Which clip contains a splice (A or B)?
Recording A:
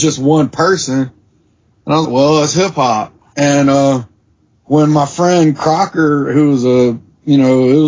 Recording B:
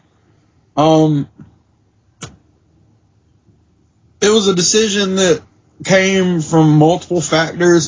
A